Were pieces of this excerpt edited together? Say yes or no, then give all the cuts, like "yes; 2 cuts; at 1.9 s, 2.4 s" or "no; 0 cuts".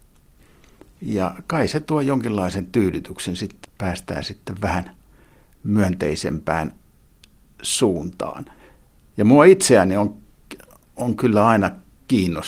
yes; 2 cuts; at 1.0 s, 3.6 s